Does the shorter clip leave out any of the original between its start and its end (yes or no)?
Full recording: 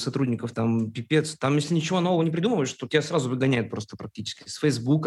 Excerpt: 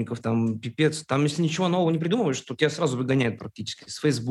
yes